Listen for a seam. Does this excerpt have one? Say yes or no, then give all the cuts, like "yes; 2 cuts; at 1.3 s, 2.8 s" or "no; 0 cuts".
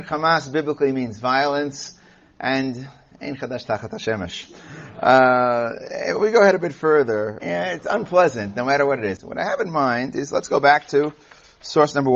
yes; 2 cuts; at 7.4 s, 9.2 s